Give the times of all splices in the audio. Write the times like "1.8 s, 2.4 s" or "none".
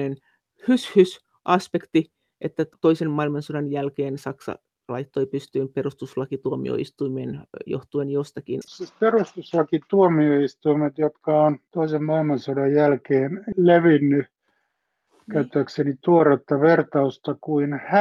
8.6 s